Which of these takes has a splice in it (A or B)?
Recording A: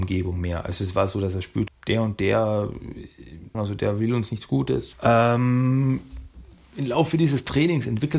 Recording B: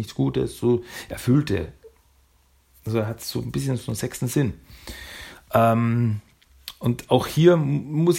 A